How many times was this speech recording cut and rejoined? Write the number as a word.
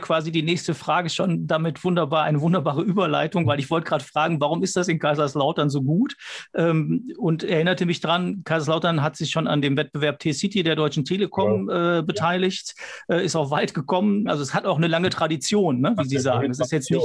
one